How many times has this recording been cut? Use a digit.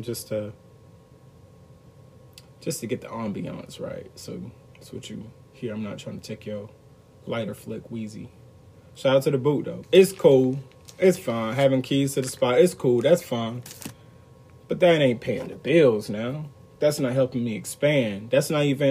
1